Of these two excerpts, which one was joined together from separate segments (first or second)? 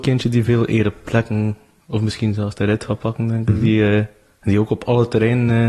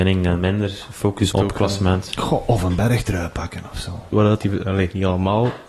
second